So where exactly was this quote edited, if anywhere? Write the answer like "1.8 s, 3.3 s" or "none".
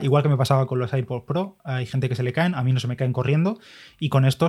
none